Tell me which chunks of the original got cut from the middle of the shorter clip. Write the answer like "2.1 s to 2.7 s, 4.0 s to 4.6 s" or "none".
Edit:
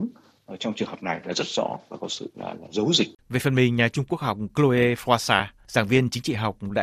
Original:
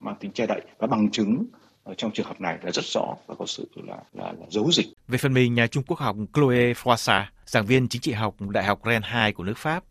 3.7 s to 4.1 s